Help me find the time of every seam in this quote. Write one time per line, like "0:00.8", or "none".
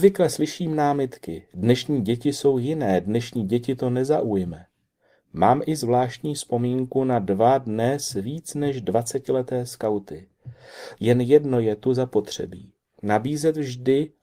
0:11.0